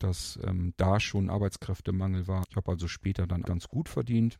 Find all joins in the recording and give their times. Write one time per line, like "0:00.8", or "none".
0:02.4
0:03.4